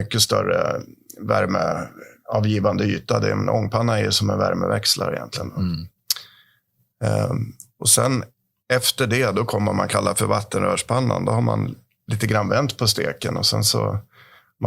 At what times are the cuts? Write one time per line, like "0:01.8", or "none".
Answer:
none